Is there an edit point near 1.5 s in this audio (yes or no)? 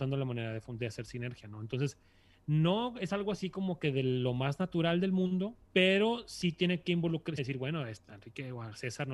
no